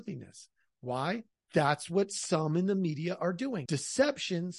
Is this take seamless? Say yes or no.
no